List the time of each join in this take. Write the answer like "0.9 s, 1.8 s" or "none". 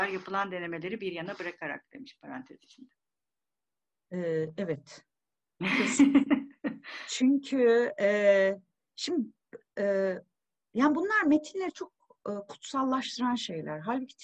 none

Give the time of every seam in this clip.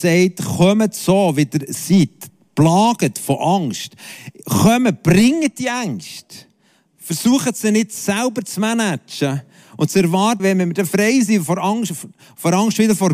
10.4 s

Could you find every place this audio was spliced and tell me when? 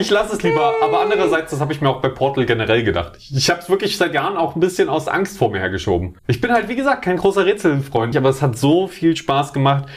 6.2 s, 8.1 s

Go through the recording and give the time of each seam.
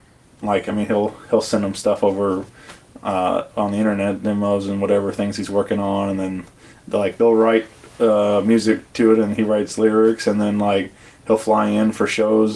none

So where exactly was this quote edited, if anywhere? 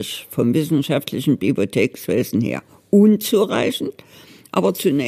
none

